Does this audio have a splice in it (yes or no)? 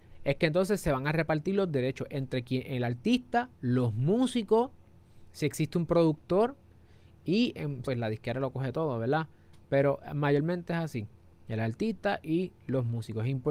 yes